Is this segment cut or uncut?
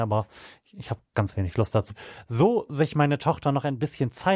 cut